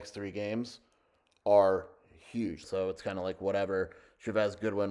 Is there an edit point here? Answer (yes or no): yes